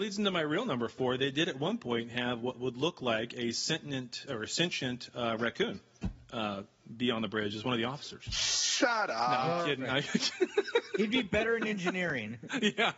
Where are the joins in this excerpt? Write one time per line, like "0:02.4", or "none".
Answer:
0:04.3